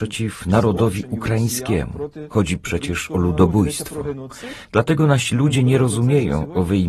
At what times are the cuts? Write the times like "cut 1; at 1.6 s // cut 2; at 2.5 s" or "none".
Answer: cut 1; at 4.6 s

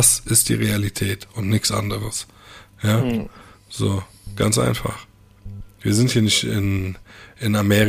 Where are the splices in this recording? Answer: none

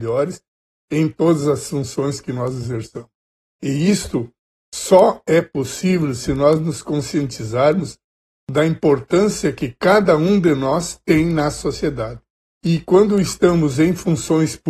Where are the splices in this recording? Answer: none

